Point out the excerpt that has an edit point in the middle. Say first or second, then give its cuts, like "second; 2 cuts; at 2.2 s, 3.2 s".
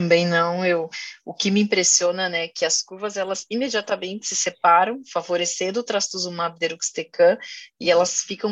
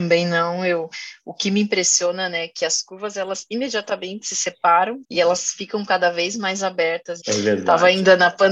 second; 2 cuts; at 5.0 s, 7.2 s